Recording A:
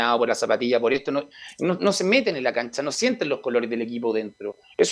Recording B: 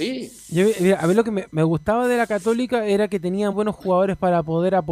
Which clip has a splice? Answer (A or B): B